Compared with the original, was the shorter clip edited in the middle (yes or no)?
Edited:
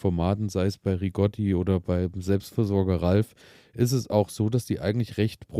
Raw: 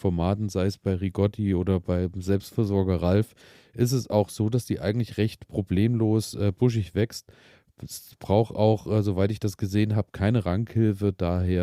no